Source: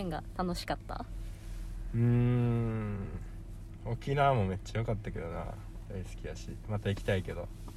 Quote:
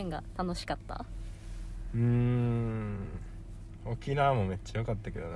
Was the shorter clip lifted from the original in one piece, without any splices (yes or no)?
yes